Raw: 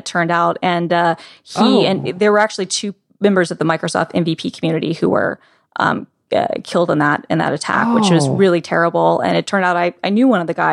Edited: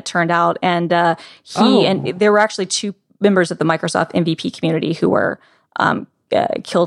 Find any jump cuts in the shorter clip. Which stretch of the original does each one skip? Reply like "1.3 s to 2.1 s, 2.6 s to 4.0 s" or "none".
none

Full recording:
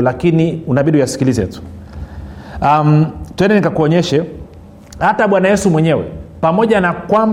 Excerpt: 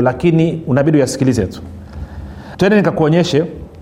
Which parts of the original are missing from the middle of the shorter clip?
2.5 s to 3.3 s

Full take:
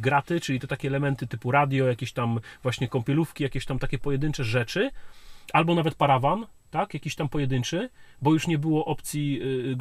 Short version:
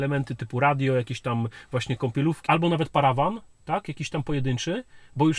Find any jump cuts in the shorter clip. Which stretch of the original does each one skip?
3.4 s to 5.5 s

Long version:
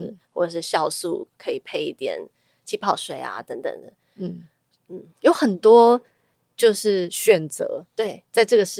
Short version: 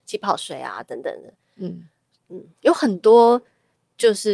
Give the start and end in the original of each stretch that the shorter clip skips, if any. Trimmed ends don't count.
none

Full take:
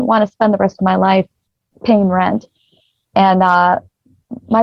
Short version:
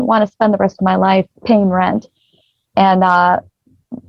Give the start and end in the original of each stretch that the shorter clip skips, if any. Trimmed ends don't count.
1.4 s to 1.7 s

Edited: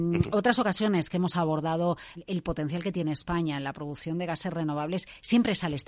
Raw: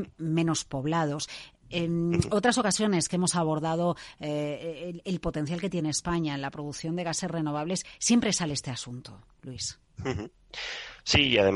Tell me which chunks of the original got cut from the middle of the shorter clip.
4.1 s to 4.9 s

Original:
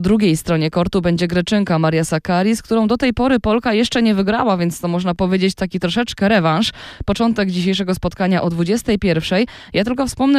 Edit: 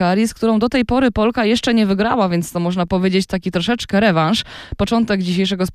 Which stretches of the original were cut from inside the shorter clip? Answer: none

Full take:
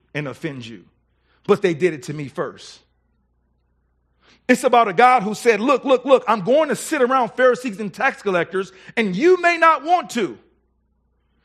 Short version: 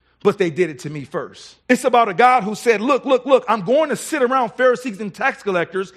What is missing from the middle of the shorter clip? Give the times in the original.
2.8 s to 4.4 s

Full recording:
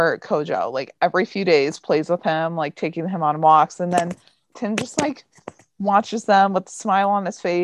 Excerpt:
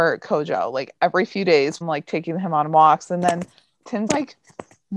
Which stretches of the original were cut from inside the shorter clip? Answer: 1.8 s to 2.5 s, 4.8 s to 4.9 s

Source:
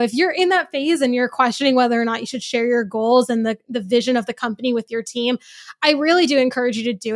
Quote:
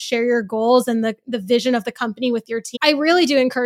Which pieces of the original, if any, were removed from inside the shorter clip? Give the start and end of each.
5.2 s to 5.8 s

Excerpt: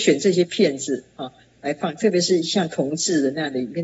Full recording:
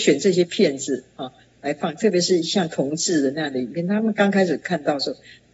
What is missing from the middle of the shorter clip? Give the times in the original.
none

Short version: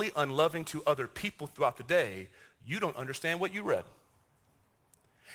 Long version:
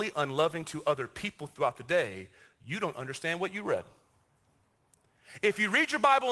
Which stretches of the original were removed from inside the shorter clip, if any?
none

